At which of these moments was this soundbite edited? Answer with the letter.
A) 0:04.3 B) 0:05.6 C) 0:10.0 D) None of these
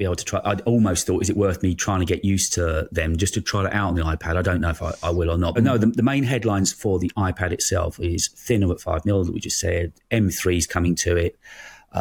B